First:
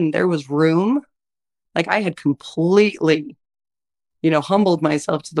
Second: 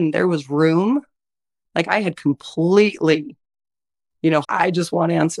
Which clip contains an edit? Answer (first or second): second